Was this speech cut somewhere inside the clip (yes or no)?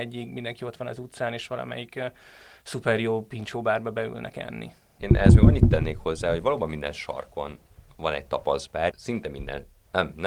yes